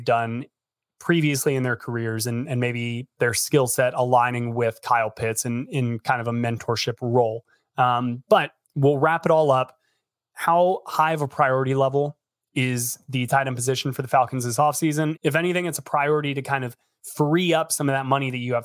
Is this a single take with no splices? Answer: no; 1 cut; at 15.2 s

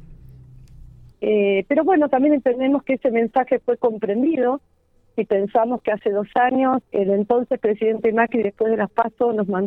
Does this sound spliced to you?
yes; 2 cuts; at 1.1 s, 6.9 s

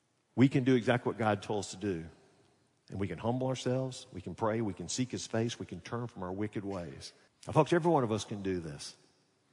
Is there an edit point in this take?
yes; 1 cut; at 7.3 s

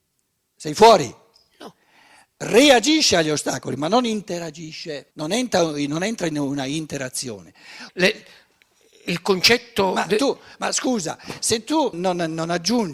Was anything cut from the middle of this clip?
yes; 3 cuts; at 5.1 s, 7.9 s, 11.9 s

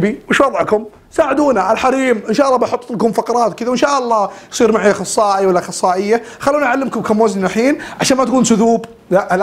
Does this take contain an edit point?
no; 0 cuts

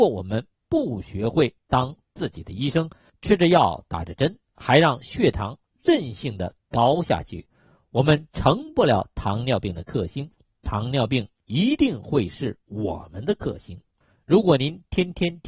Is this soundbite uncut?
yes; 0 cuts

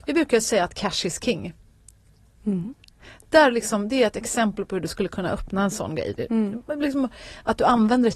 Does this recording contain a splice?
yes; 1 cut; at 2.3 s

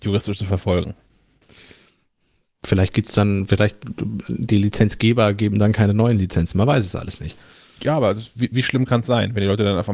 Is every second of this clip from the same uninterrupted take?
yes; 0 cuts

